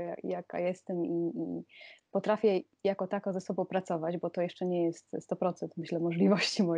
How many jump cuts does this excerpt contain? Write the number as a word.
zero